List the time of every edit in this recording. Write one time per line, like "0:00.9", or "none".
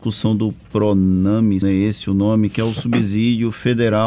0:01.6